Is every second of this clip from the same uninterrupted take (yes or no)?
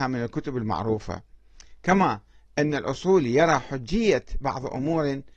yes